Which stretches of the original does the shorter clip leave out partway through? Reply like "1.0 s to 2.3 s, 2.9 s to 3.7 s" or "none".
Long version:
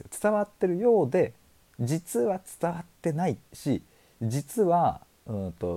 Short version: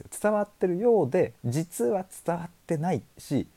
1.4 s to 1.7 s